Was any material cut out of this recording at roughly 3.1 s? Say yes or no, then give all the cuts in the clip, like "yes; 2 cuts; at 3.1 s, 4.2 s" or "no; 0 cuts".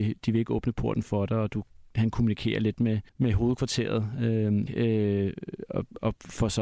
yes; 2 cuts; at 3.1 s, 4.7 s